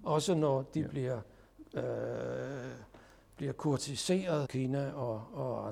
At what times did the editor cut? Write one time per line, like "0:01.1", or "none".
0:04.4